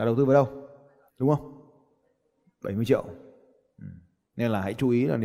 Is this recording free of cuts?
no; 1 cut; at 1.1 s

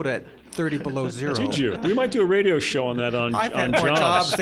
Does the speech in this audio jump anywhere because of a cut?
yes; 1 cut; at 1.8 s

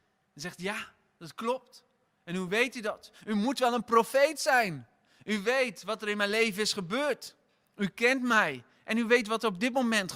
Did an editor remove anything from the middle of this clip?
no; 0 cuts

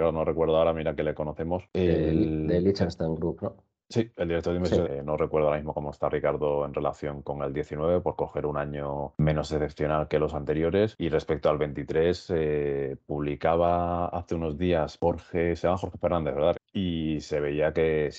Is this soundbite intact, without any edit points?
no; 2 cuts; at 4.8 s, 16.5 s

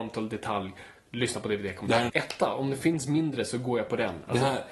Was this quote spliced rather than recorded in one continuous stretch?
yes; 1 cut; at 2.1 s

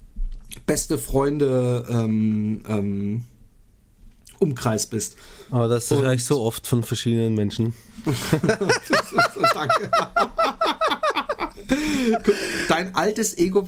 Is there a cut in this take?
no; 0 cuts

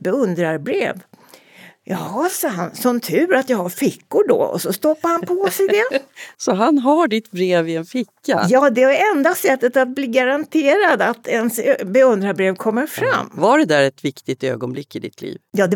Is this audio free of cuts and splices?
yes; 0 cuts

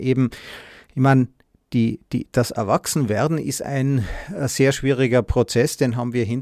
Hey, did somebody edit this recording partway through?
no; 0 cuts

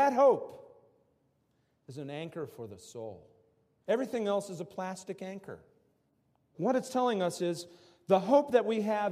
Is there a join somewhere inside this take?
yes; 2 cuts; at 3.8 s, 6.5 s

